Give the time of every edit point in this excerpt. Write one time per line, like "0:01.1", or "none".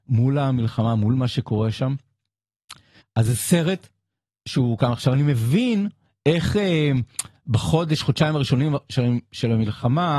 0:03.0